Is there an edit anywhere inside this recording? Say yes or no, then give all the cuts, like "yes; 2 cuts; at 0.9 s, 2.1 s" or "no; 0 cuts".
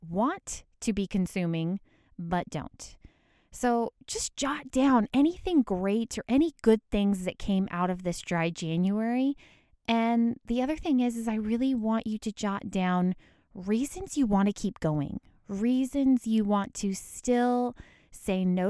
no; 0 cuts